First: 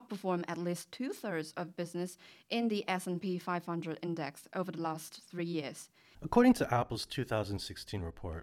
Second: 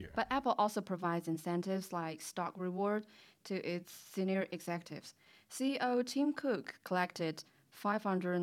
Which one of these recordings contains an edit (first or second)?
first